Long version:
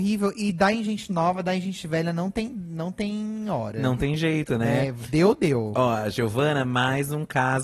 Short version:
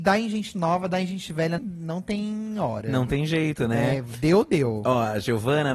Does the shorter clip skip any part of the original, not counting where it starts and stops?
yes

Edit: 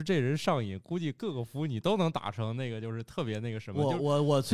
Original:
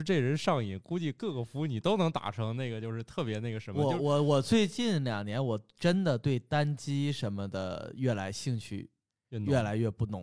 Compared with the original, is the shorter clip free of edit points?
yes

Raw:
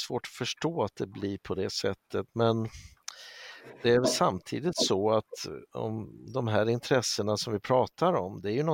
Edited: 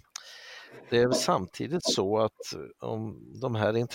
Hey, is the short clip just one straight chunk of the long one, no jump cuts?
yes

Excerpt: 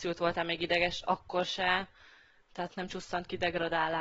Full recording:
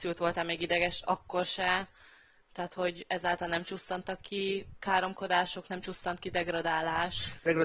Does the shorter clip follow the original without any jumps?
no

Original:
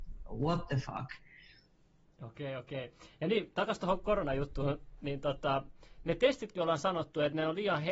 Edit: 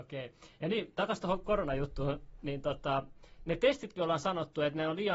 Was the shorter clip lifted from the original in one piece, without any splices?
yes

